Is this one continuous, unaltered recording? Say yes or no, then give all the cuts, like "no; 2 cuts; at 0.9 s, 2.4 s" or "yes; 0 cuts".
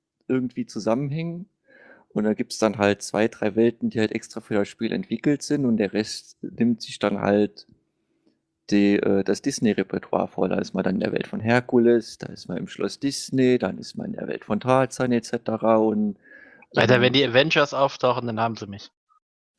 yes; 0 cuts